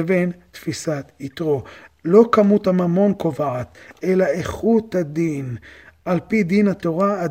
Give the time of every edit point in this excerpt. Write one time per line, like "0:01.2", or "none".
none